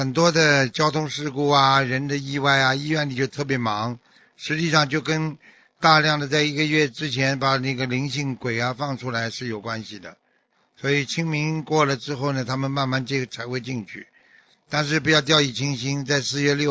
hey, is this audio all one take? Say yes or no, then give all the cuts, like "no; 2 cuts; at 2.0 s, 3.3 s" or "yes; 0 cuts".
yes; 0 cuts